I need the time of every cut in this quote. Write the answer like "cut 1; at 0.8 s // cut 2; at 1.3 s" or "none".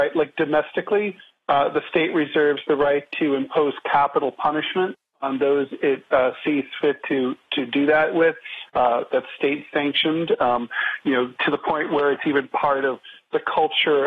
cut 1; at 8.7 s